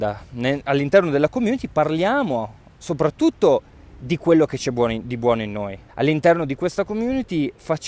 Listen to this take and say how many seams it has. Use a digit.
1